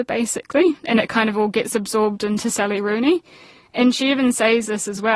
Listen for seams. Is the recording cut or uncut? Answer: uncut